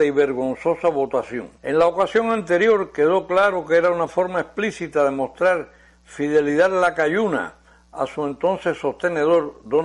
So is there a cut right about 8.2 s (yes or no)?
no